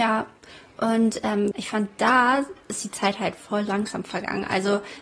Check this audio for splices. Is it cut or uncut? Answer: cut